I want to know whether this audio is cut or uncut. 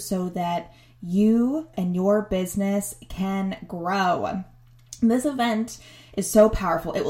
cut